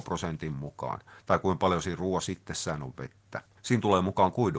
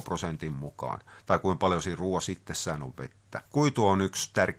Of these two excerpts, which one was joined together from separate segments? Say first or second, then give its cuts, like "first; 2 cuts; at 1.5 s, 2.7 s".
second; 1 cut; at 3.5 s